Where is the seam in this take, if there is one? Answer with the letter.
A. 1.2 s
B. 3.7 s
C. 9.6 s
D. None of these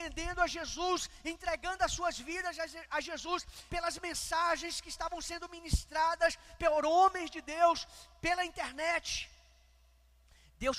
B